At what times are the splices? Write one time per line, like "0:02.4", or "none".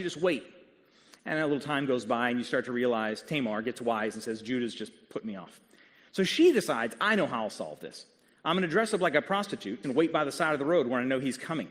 0:09.8